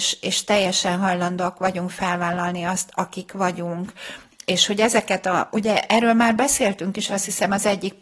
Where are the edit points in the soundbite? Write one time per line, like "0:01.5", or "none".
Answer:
none